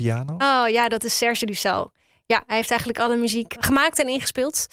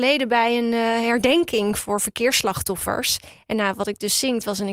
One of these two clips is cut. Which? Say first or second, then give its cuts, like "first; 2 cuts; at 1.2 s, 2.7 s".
first; 1 cut; at 3.6 s